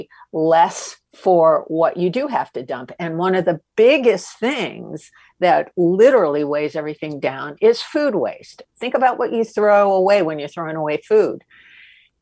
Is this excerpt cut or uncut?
uncut